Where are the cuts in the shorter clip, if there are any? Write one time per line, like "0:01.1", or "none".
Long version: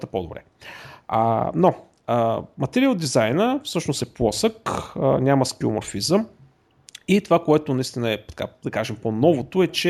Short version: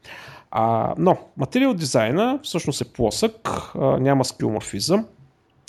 0:01.3